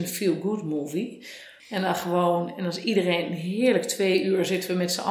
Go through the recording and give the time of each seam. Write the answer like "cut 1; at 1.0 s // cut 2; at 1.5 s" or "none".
cut 1; at 1.6 s